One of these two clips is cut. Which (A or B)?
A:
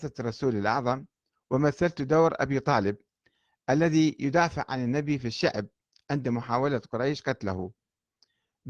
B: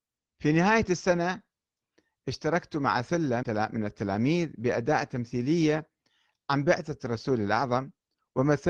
B